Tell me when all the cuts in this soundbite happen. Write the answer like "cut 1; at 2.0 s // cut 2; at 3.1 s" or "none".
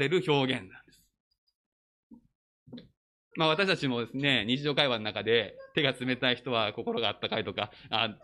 cut 1; at 3.3 s